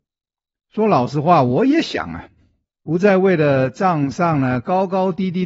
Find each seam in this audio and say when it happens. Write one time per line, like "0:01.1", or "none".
0:02.7